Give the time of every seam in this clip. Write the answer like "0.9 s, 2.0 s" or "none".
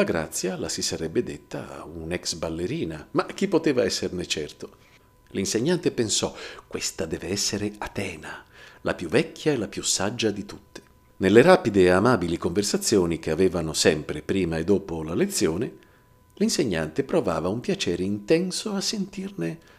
5.2 s, 11.1 s